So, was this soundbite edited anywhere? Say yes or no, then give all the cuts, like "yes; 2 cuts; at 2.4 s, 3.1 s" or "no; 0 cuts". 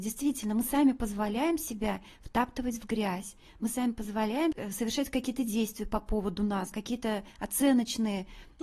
no; 0 cuts